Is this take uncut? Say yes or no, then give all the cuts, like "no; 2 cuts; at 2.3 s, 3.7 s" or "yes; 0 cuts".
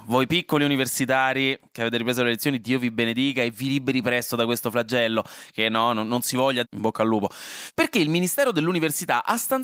no; 1 cut; at 6.6 s